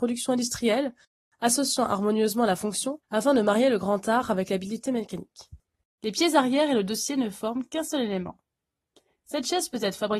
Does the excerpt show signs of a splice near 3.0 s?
yes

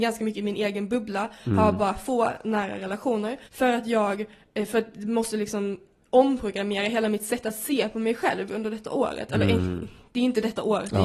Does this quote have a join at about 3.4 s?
yes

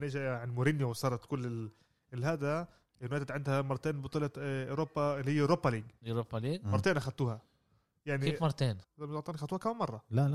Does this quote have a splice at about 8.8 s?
yes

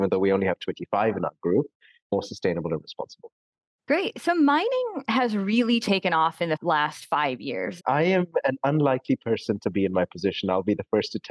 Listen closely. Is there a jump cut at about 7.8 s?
yes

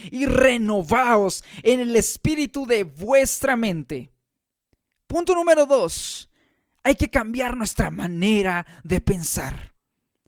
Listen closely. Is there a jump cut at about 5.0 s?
no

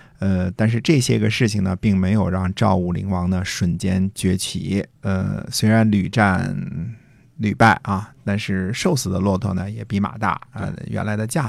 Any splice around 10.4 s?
no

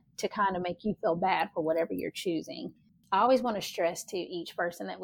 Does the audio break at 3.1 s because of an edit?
no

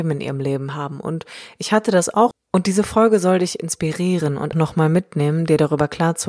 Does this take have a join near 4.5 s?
yes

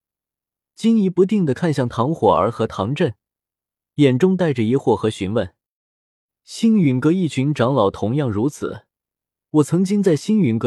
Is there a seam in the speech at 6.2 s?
no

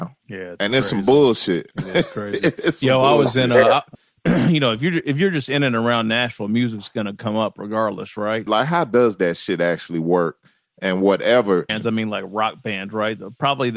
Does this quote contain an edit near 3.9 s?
yes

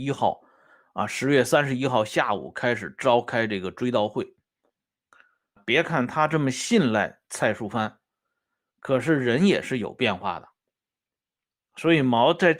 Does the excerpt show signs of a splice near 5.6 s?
yes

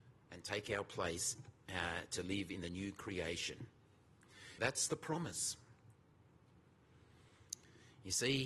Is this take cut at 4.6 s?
yes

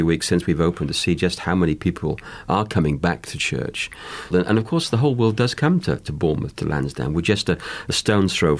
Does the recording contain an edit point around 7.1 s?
no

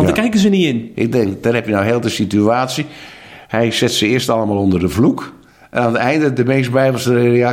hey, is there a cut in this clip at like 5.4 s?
no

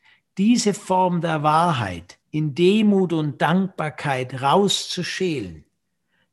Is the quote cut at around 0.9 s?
no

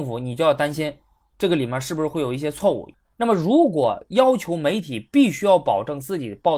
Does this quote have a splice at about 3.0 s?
yes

